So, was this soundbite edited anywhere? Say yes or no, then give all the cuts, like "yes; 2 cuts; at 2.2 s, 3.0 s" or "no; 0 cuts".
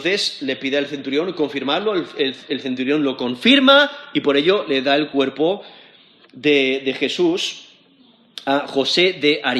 no; 0 cuts